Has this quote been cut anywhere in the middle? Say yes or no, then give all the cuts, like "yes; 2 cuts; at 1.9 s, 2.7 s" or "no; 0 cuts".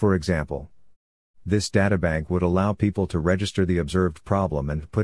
no; 0 cuts